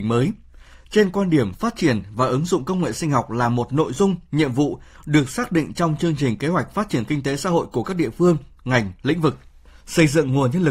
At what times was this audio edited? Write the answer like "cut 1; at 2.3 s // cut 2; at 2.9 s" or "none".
cut 1; at 9.7 s